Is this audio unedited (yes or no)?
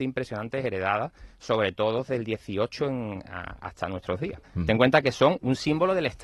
no